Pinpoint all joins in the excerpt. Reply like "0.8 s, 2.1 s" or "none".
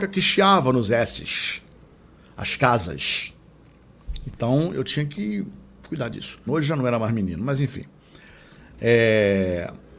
6.5 s